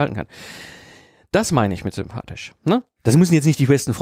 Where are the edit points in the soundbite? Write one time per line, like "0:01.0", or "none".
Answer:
none